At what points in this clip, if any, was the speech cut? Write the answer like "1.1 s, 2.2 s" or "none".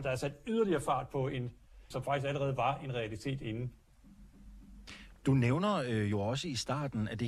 1.9 s